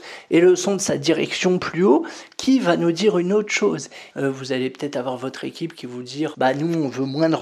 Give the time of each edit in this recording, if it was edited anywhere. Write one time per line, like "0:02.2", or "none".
0:04.1
0:06.3